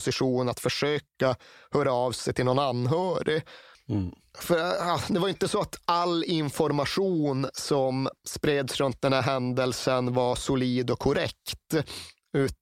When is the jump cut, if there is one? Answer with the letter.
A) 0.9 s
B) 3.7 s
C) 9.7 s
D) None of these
B